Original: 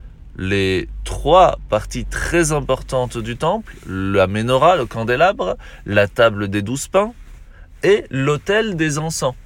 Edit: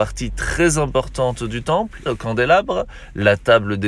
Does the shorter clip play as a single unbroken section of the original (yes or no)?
no